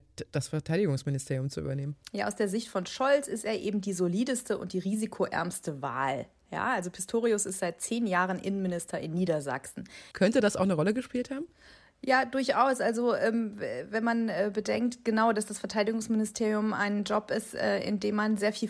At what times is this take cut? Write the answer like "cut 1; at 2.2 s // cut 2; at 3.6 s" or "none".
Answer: cut 1; at 10.1 s